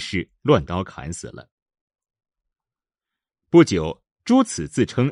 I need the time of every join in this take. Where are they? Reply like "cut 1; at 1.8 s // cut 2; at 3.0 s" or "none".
none